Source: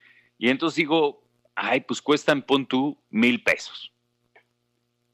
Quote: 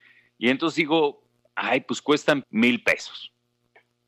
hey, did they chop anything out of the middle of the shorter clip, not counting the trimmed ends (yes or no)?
yes